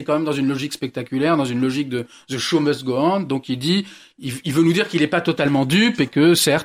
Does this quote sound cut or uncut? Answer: uncut